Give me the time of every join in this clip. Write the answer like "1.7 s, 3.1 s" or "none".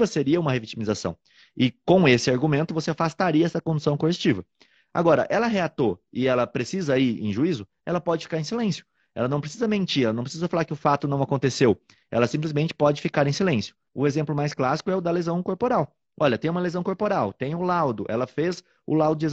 13.9 s